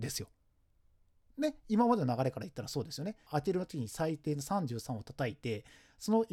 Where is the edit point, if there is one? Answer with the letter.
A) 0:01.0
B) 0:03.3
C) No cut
B